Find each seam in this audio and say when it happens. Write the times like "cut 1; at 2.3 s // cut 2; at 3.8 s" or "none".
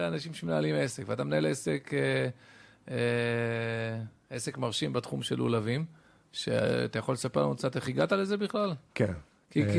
none